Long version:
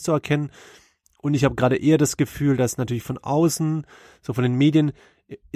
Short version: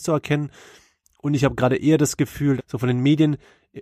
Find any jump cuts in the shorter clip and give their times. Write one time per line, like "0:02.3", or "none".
0:02.6